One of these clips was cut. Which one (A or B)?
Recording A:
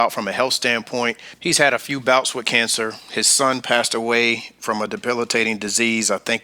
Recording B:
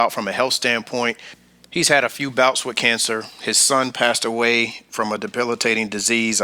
A